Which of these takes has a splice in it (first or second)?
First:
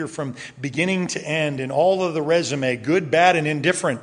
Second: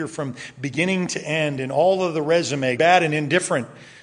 second